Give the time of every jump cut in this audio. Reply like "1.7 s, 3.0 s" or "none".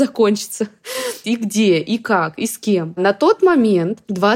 1.2 s